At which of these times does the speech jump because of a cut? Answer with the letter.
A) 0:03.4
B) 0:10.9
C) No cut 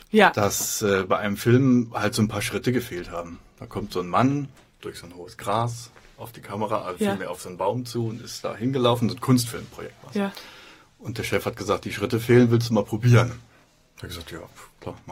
C